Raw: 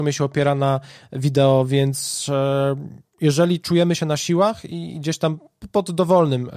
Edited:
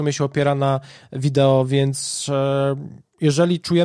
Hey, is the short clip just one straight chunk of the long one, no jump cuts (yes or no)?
yes